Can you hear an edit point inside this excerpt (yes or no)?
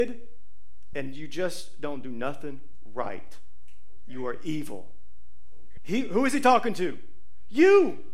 yes